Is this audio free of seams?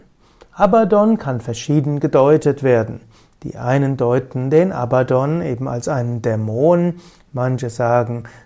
yes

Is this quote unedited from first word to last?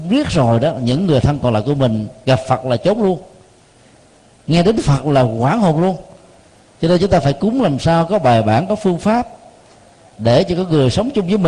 yes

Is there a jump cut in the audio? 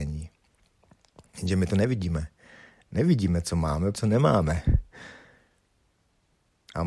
yes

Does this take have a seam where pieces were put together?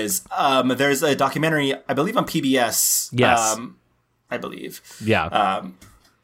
yes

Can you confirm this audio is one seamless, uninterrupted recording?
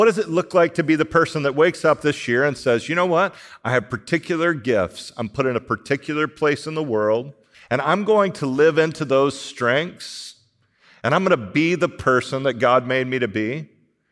no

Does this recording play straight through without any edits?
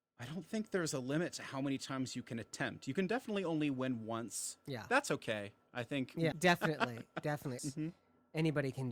no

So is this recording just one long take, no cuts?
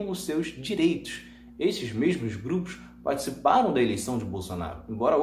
yes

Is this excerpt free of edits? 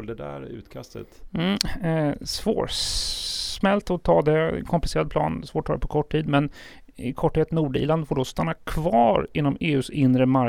yes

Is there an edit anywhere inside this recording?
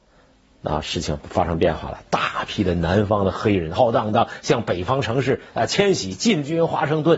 yes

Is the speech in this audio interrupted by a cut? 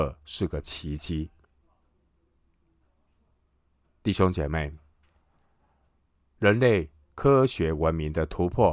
no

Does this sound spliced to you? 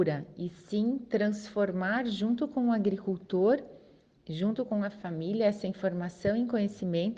no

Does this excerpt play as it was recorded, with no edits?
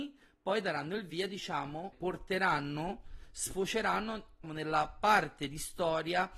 no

